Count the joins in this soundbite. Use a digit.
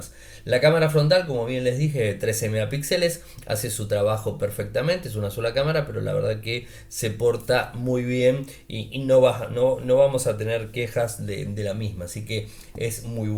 0